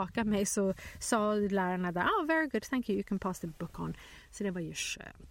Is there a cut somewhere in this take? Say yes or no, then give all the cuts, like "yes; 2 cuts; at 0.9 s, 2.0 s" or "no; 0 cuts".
no; 0 cuts